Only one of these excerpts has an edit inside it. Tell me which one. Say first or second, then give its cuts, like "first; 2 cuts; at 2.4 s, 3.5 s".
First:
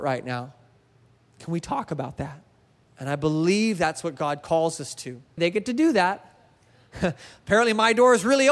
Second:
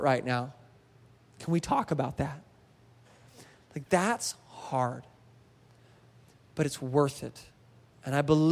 first; 2 cuts; at 2.8 s, 5.4 s